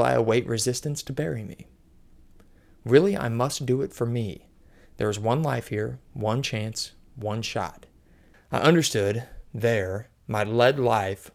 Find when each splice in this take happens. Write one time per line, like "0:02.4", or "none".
0:08.3